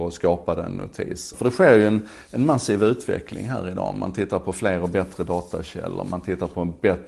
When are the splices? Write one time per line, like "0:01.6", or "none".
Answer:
0:01.3